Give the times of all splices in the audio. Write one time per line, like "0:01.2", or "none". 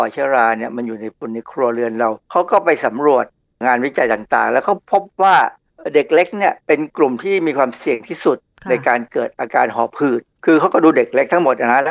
0:06.6